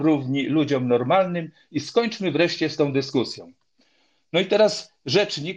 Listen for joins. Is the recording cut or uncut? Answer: uncut